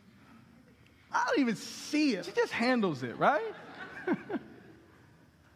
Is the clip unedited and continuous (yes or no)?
no